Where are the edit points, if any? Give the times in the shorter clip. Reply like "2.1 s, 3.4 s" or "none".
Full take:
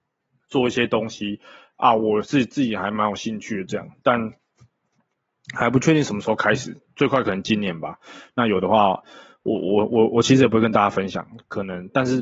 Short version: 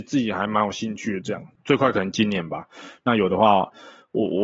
1.6 s